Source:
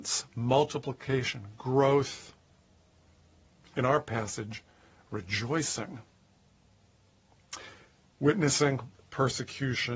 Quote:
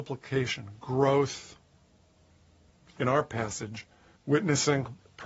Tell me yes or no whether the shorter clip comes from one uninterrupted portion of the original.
no